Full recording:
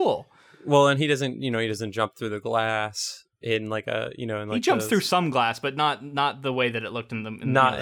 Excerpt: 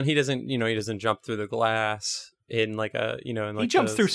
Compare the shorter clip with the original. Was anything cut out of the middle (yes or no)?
no